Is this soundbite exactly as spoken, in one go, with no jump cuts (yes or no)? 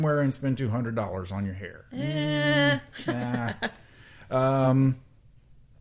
yes